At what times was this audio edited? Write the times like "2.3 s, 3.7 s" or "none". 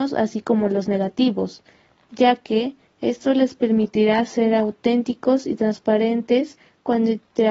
none